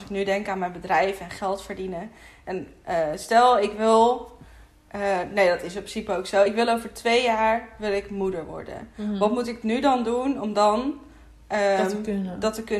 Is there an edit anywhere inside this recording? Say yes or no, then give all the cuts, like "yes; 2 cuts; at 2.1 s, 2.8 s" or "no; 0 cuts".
no; 0 cuts